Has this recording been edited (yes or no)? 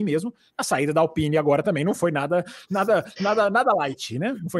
no